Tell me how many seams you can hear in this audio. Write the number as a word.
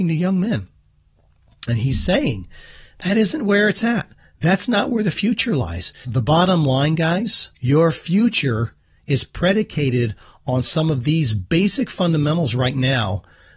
two